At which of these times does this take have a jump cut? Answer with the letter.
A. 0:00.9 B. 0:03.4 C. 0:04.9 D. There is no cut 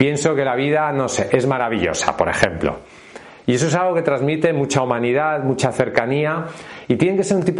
D